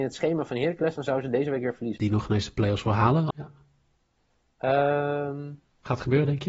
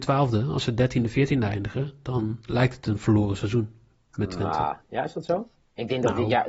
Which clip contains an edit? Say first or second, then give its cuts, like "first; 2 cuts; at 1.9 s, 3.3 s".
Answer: first; 2 cuts; at 2.0 s, 3.3 s